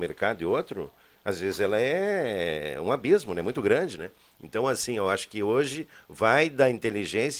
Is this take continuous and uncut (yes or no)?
yes